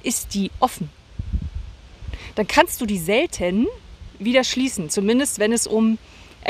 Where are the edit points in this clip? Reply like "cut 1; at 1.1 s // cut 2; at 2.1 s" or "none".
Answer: none